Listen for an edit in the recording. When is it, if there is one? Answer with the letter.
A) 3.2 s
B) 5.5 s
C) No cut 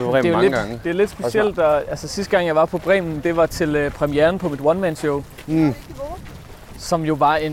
C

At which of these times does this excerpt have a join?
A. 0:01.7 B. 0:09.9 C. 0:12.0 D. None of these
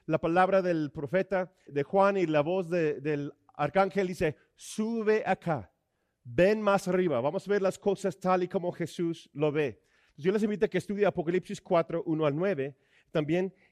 A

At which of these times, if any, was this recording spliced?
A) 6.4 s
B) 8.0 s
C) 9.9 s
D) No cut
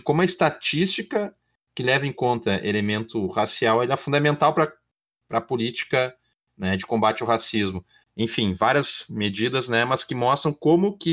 B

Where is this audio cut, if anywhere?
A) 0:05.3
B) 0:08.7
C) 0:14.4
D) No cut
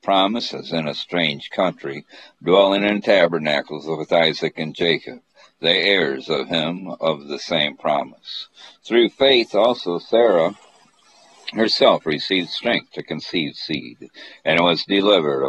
B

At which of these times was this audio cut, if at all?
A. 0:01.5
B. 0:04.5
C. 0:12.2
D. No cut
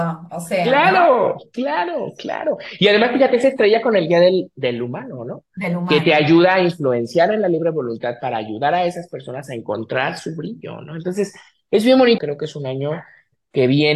C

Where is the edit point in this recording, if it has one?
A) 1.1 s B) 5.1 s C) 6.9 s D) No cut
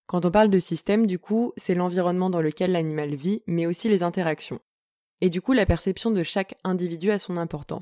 D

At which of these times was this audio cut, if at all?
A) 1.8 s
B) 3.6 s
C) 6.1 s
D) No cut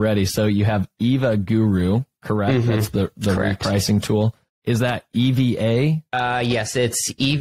C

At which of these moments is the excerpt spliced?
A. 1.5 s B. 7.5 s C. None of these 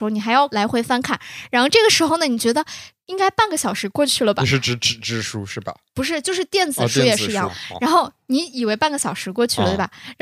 B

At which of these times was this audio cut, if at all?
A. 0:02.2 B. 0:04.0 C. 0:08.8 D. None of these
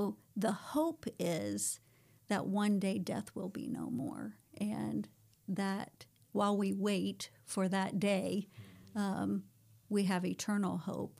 D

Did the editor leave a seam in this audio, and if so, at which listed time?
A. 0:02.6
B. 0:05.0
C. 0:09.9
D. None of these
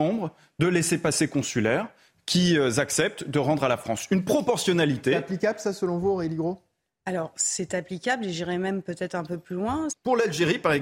C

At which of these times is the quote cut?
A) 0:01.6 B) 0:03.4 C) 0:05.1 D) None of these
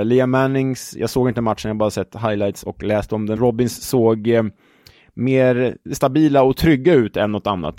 B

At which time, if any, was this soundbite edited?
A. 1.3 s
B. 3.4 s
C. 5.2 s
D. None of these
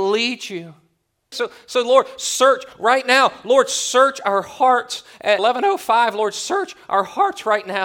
A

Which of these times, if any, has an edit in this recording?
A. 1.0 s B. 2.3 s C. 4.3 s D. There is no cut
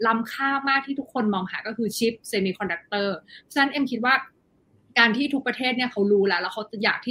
D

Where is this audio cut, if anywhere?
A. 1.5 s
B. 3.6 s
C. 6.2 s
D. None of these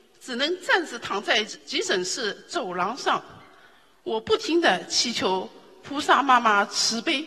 A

